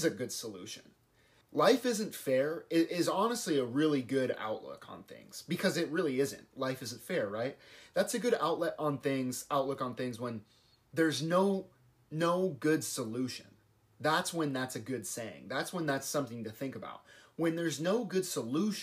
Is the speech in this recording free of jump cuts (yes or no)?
no